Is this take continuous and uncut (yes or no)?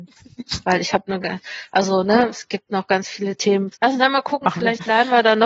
no